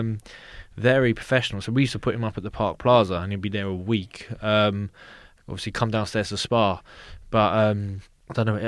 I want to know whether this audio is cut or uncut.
uncut